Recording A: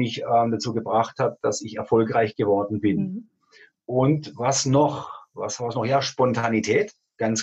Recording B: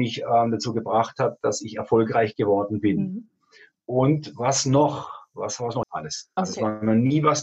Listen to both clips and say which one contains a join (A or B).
B